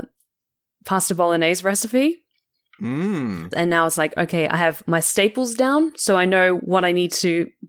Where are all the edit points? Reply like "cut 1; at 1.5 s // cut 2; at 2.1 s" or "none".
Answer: cut 1; at 3.5 s